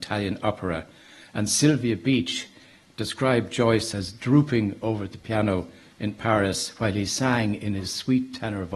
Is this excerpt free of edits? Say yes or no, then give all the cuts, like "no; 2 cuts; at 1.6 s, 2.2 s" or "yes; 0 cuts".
yes; 0 cuts